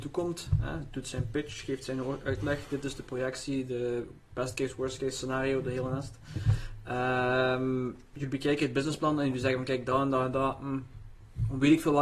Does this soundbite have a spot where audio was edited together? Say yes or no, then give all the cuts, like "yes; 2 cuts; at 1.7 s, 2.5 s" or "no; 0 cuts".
no; 0 cuts